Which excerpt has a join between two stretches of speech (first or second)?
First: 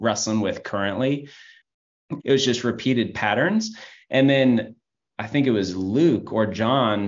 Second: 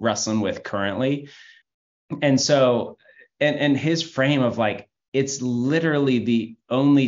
first